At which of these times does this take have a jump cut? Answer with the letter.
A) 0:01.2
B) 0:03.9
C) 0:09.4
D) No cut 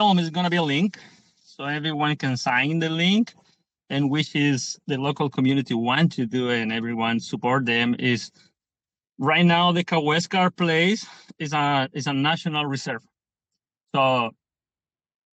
D